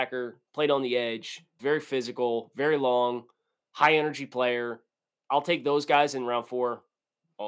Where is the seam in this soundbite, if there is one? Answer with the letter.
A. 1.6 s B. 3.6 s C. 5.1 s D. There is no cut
A